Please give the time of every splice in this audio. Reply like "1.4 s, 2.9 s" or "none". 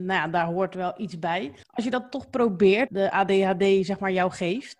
1.6 s, 2.9 s

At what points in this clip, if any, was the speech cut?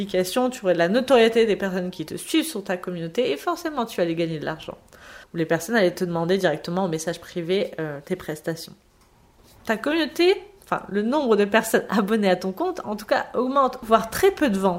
5.2 s, 9.6 s, 13.8 s

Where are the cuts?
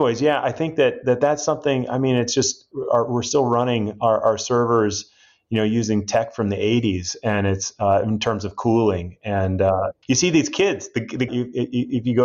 2.7 s, 10.0 s, 11.3 s

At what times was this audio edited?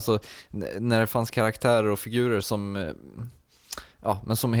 2.4 s

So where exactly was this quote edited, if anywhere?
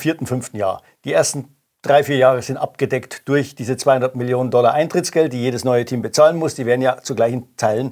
none

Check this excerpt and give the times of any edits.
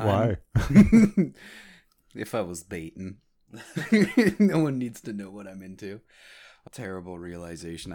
6.7 s

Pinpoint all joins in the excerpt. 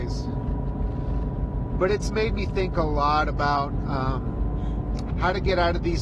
5.1 s

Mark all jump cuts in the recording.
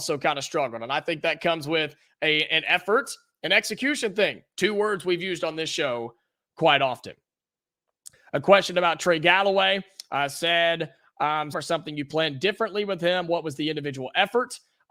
11.5 s

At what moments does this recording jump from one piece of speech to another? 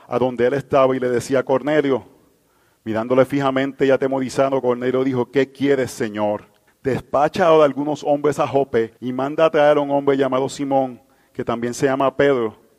6.7 s, 9.0 s

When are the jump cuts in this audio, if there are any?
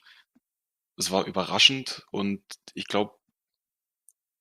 none

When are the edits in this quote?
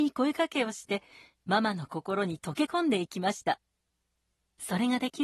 none

